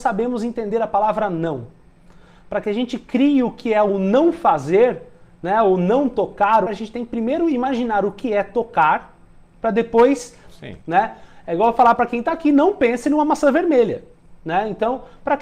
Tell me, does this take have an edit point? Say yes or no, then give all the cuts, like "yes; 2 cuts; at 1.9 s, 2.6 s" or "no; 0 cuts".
yes; 3 cuts; at 6.7 s, 10.8 s, 14.4 s